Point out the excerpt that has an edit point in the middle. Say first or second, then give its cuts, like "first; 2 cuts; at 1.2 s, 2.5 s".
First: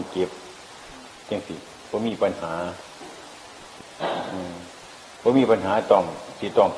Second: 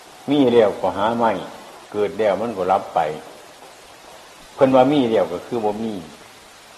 second; 1 cut; at 1.8 s